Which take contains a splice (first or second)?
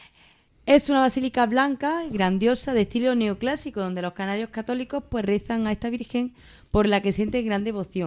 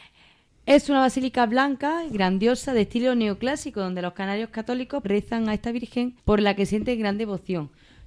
second